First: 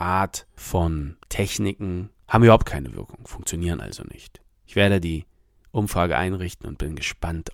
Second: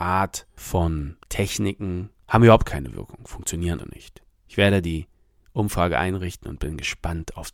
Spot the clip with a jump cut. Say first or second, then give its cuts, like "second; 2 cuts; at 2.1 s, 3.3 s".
second; 1 cut; at 3.8 s